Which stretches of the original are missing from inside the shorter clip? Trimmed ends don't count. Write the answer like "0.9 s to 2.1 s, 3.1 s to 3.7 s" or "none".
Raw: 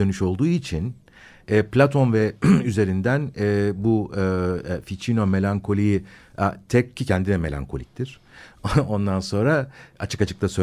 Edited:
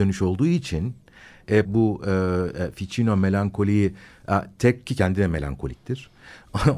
1.6 s to 3.7 s

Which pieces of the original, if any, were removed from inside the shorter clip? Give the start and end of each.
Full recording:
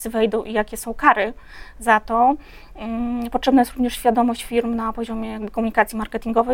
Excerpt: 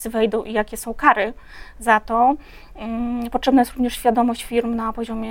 none

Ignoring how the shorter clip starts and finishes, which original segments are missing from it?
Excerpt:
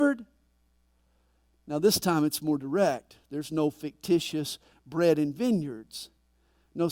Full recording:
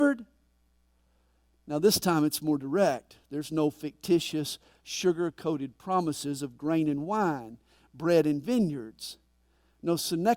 4.7 s to 7.8 s

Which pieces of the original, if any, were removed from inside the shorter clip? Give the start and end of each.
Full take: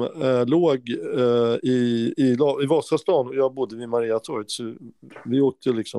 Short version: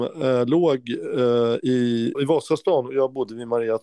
2.1 s to 2.6 s

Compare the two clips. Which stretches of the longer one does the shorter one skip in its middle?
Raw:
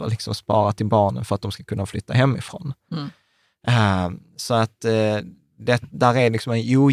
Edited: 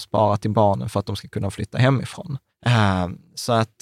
2.8 s to 3.5 s

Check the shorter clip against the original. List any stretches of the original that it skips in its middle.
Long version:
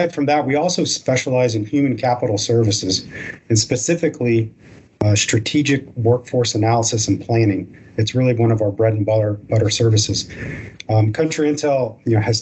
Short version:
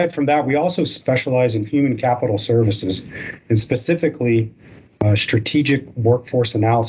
none

